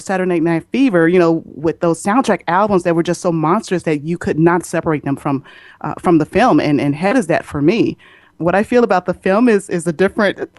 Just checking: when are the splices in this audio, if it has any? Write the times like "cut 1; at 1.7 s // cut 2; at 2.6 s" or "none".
none